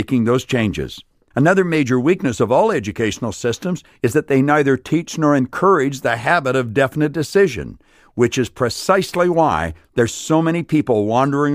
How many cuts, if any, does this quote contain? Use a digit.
1